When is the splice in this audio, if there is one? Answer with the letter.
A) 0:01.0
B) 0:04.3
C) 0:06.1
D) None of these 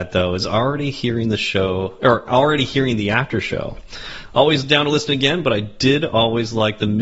D